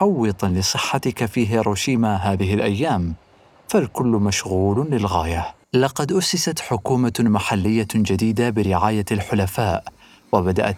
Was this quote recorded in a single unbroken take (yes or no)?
no